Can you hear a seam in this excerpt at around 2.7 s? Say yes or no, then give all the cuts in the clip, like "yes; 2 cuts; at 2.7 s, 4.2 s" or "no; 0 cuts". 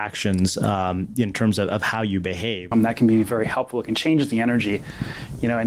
yes; 1 cut; at 2.7 s